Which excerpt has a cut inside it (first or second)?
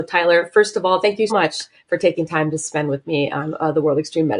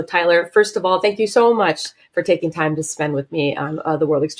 first